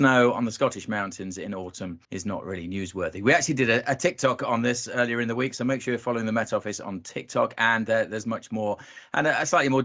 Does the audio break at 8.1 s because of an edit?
no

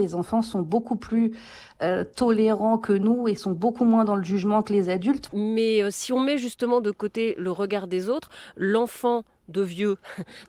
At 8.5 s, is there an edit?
no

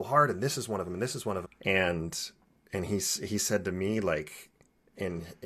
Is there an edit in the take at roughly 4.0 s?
no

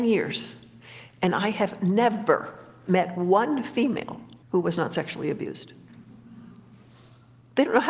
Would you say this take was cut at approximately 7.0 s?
no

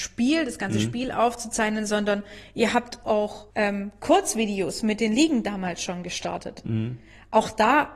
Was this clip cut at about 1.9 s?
no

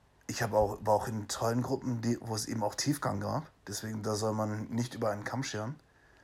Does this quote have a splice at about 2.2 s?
yes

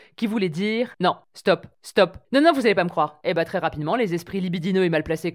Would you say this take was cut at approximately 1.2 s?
no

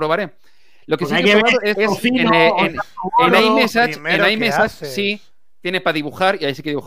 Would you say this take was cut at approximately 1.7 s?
yes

